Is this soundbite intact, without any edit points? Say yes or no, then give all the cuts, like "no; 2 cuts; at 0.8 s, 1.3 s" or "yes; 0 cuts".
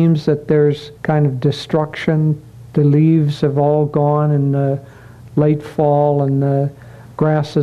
no; 1 cut; at 1.0 s